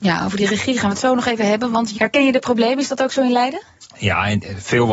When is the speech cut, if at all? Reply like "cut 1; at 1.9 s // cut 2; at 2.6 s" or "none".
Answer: cut 1; at 2.0 s

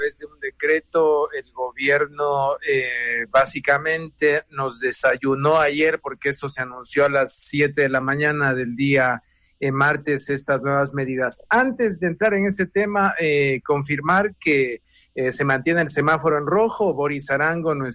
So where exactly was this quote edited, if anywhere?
none

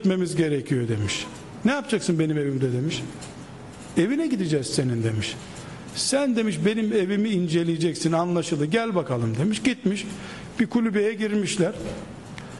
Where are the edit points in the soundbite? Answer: none

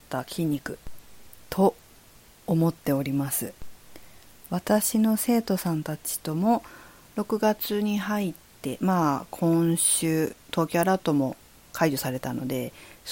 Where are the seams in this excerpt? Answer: none

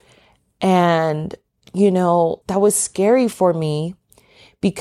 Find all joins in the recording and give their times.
cut 1; at 2.4 s

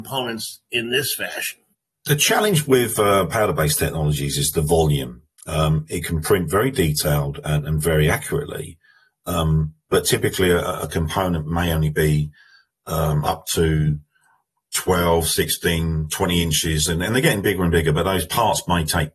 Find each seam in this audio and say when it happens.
none

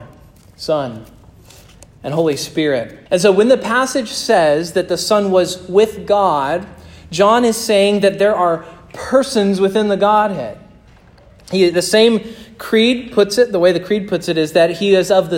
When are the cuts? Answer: cut 1; at 3.1 s

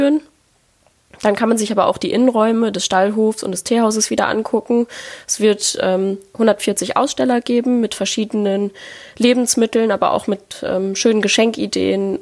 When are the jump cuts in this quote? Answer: none

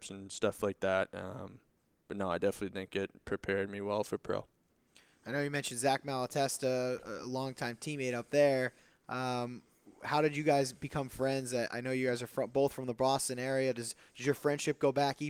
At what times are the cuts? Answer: none

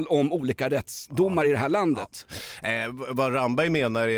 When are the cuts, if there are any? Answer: none

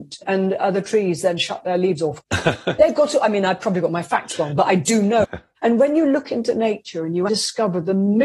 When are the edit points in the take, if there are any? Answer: cut 1; at 2.8 s // cut 2; at 5.2 s // cut 3; at 7.3 s

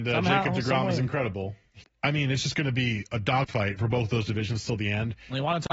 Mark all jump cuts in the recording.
cut 1; at 1.8 s

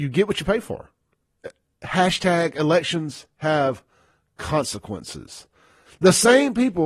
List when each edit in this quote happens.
cut 1; at 5.9 s

